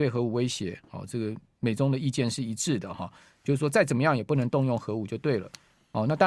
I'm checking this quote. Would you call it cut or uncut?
uncut